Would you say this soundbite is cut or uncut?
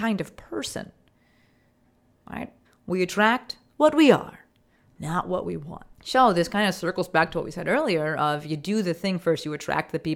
cut